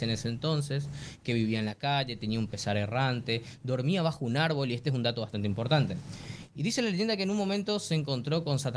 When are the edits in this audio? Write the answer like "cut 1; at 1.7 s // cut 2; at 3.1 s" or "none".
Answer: none